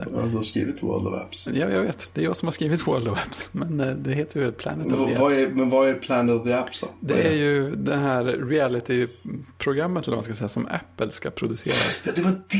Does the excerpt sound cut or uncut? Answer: cut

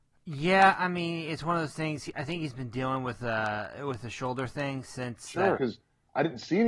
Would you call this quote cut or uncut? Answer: cut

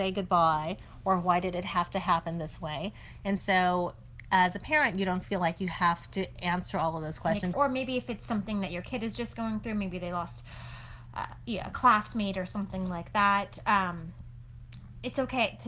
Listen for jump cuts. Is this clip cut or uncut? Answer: cut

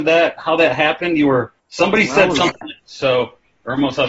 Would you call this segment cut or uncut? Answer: cut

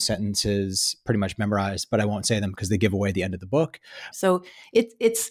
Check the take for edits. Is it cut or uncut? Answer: cut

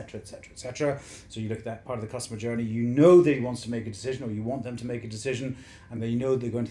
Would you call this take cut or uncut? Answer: uncut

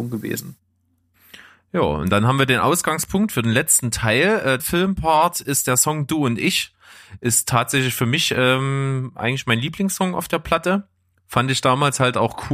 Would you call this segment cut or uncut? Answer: cut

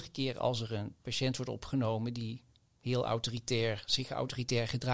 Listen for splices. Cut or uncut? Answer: uncut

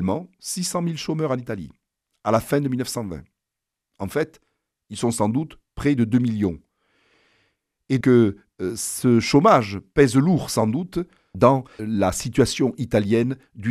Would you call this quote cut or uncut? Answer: cut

